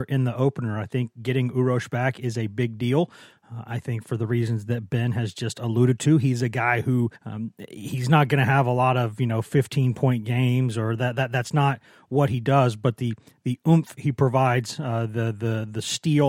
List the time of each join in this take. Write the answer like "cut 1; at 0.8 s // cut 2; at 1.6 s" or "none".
cut 1; at 7.2 s